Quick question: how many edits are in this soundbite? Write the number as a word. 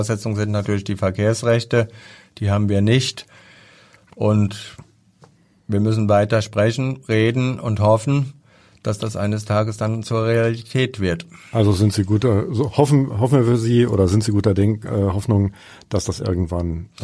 zero